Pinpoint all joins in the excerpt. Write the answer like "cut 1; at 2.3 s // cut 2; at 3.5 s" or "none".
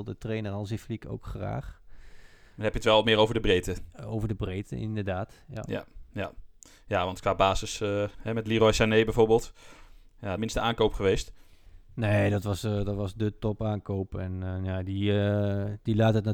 cut 1; at 10.4 s